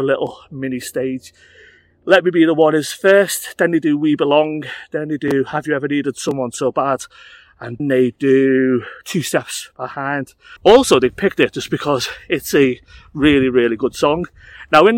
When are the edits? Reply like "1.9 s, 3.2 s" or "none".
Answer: 7.8 s, 10.6 s